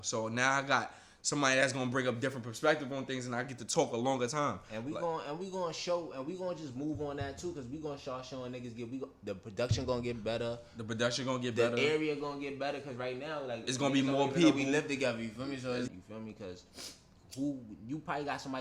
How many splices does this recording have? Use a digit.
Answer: 2